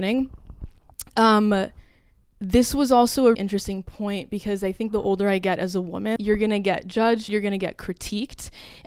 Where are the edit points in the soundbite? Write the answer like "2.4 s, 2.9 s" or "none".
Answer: 3.3 s, 6.2 s, 7.3 s